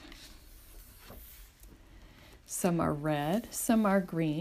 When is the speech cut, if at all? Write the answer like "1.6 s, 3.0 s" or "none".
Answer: none